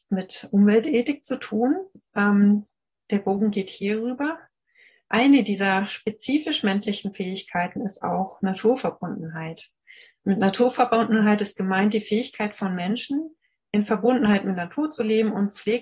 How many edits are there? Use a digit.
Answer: 0